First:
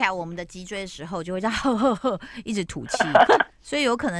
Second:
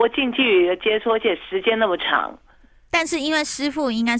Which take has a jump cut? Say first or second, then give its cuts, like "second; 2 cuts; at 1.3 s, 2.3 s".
first; 1 cut; at 3.3 s